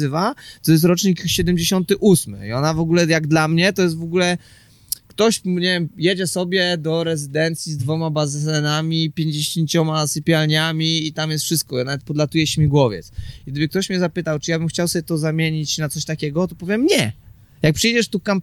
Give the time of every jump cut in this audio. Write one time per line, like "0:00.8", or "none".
none

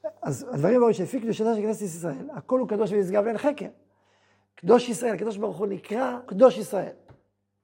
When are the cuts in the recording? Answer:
0:04.5
0:06.3

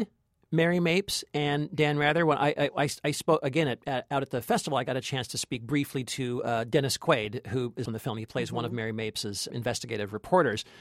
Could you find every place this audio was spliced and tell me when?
0:07.8
0:09.5

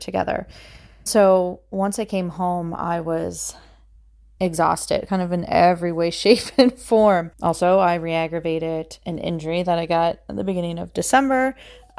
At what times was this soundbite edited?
none

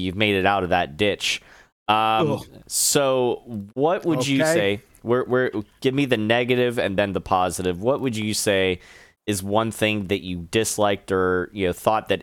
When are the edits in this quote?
none

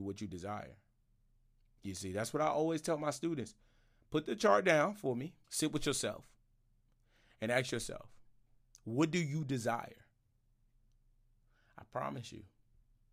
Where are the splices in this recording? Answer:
0:05.4

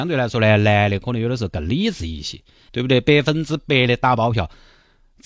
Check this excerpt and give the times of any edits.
0:02.7

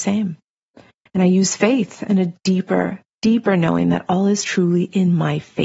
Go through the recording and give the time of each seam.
0:01.1
0:03.1

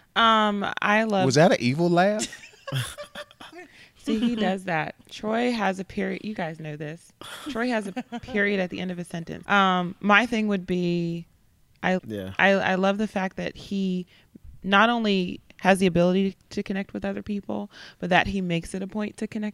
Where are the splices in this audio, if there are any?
0:09.4
0:12.0

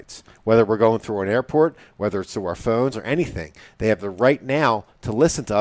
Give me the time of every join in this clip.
0:02.9

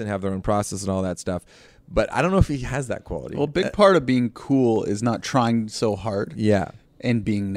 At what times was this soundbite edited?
0:01.7

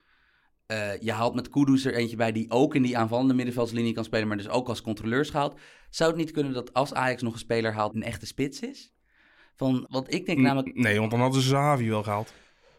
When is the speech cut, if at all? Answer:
0:07.9
0:09.9

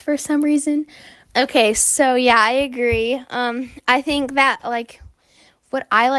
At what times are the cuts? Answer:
0:01.3

